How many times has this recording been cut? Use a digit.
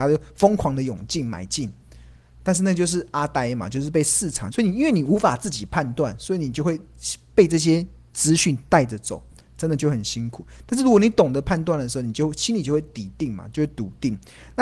1